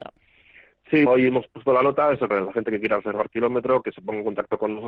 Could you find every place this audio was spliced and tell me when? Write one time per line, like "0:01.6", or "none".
0:01.1
0:02.3